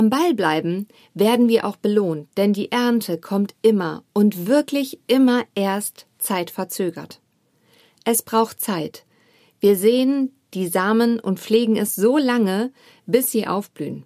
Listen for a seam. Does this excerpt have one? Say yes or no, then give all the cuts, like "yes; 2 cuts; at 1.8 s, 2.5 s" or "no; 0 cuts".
no; 0 cuts